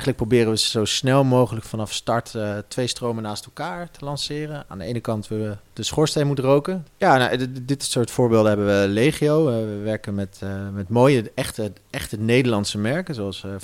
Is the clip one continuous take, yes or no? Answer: no